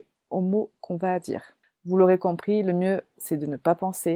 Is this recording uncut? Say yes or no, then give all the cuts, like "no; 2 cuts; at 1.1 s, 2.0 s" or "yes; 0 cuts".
no; 1 cut; at 1.7 s